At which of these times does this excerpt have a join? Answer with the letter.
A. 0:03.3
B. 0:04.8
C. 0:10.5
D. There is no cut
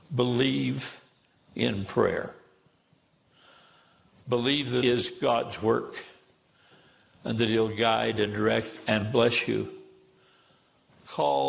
B